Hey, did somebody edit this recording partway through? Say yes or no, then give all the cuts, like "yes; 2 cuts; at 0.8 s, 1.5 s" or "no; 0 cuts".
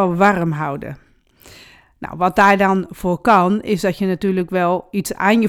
no; 0 cuts